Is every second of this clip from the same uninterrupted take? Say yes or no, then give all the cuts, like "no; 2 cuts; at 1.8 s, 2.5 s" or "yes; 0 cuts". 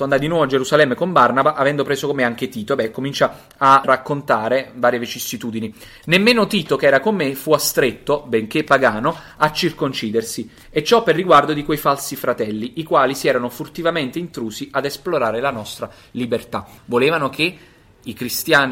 no; 2 cuts; at 3.8 s, 16.8 s